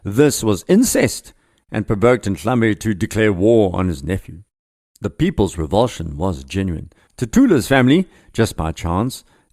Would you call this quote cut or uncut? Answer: cut